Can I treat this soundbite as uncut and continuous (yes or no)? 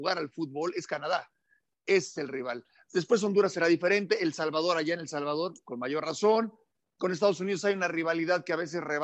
yes